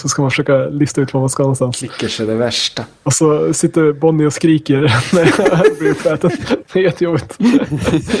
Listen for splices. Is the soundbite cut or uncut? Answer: uncut